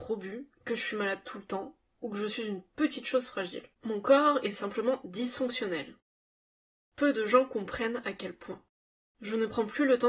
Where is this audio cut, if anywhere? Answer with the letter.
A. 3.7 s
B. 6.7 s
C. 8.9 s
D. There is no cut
A